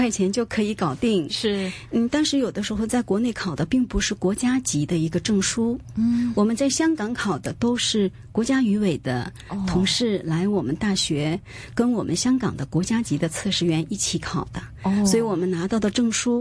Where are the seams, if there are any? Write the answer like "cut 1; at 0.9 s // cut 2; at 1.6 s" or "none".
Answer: none